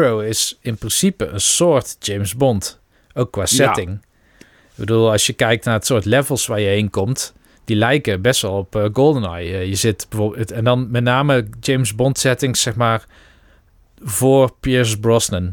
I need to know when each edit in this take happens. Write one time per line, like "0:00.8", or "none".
none